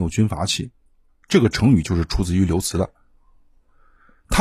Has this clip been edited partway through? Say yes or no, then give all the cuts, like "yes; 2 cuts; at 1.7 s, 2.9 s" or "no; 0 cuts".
yes; 1 cut; at 1.2 s